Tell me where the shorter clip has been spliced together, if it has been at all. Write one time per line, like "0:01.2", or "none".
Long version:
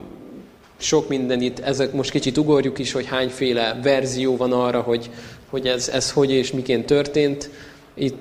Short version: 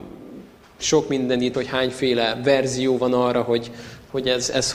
0:01.5